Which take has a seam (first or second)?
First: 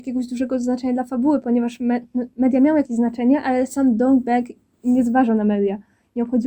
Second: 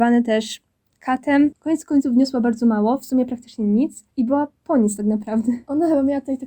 second